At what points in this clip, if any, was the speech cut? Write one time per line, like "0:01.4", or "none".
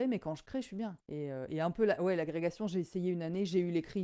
0:01.0